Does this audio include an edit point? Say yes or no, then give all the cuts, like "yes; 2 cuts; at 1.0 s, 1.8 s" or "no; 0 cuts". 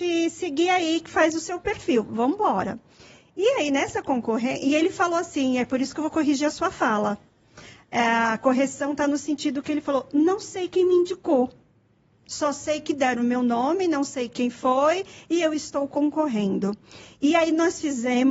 no; 0 cuts